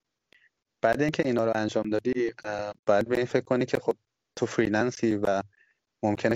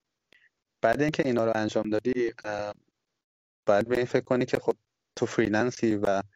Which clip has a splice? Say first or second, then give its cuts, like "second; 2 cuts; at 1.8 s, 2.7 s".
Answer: first; 1 cut; at 2.8 s